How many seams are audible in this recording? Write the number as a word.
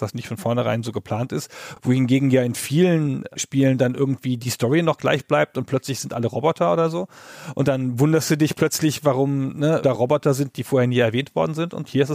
zero